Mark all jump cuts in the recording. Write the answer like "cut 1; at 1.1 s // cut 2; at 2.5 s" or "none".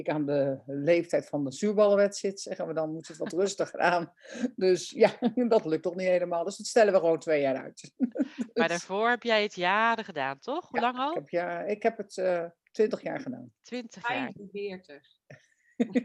none